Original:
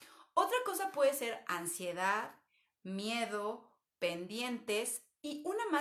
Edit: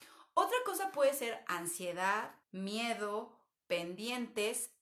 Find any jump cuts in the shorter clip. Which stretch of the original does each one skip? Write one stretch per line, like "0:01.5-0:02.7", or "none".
0:02.4-0:02.7